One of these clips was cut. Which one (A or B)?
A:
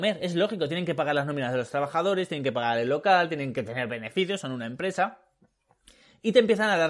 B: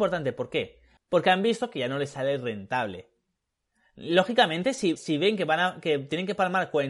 B